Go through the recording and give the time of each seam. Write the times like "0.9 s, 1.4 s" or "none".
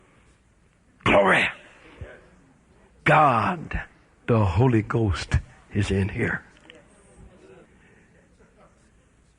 none